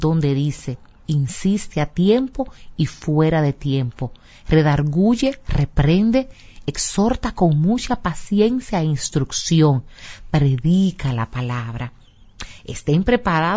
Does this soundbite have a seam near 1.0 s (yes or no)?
yes